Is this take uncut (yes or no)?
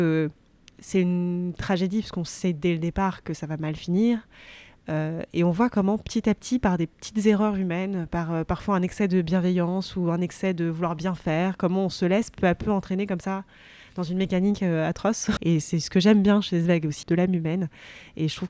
no